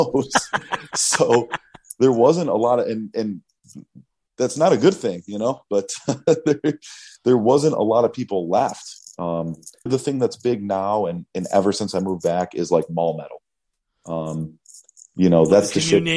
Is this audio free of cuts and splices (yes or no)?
no